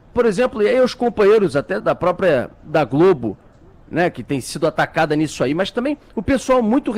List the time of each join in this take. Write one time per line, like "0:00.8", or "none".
0:01.8